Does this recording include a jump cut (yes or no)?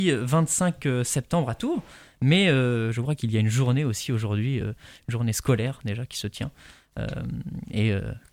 no